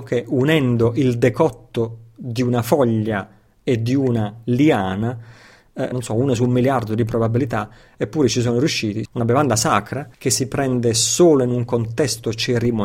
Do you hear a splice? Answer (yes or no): yes